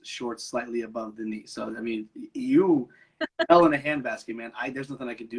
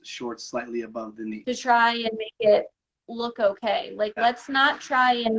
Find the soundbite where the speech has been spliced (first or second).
second